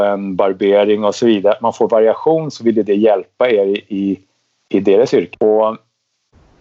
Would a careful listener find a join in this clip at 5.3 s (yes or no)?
yes